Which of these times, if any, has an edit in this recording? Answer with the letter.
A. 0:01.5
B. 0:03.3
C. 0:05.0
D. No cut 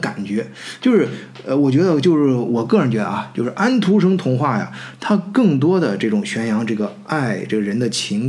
D